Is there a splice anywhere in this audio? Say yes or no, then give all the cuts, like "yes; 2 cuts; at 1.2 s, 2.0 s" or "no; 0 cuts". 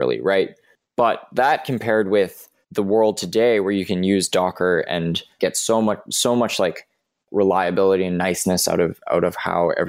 no; 0 cuts